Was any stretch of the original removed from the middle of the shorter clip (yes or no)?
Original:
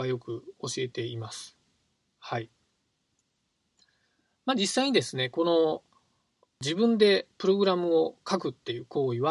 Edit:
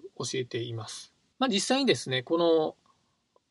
yes